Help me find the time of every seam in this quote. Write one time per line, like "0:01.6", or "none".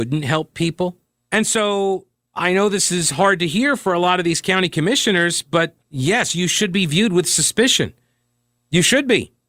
0:01.2
0:05.8